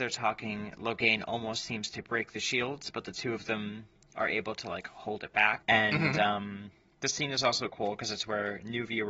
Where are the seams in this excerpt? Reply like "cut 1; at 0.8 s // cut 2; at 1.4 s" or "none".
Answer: cut 1; at 5.6 s

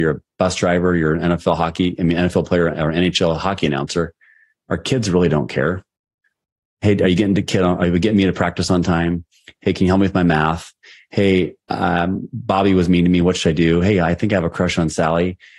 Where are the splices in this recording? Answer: none

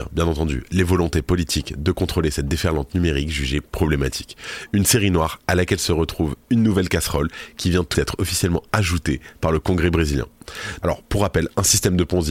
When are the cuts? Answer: cut 1; at 7.9 s // cut 2; at 10.8 s

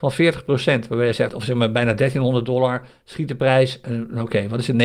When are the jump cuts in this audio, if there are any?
cut 1; at 1.3 s

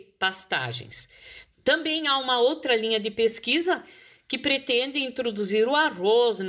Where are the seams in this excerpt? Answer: cut 1; at 1.5 s

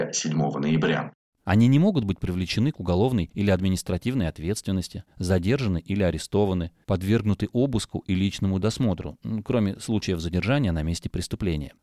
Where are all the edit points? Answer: cut 1; at 1.4 s

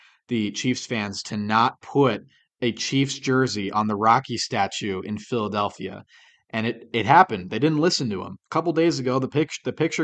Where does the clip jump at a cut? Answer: none

